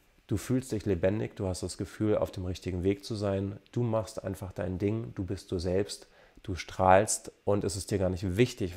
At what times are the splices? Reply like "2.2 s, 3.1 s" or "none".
none

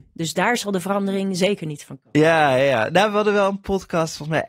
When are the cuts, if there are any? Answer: none

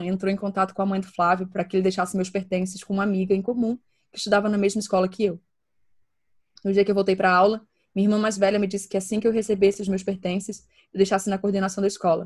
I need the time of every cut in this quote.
none

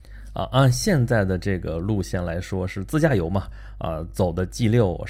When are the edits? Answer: none

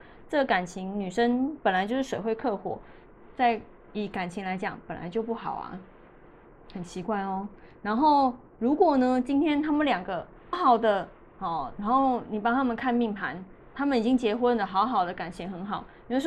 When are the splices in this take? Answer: 10.5 s

